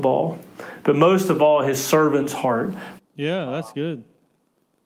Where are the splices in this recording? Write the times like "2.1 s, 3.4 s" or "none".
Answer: 3.0 s